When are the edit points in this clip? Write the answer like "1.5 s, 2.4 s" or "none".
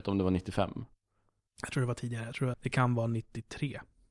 2.5 s